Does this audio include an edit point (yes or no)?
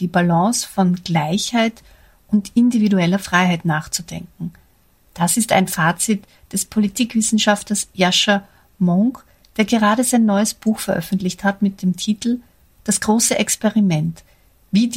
no